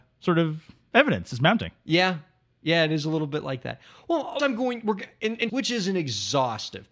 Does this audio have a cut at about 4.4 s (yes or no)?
yes